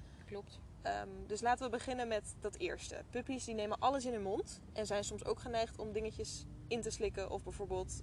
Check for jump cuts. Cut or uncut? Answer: uncut